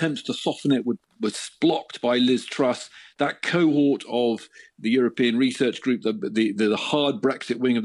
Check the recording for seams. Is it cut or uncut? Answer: uncut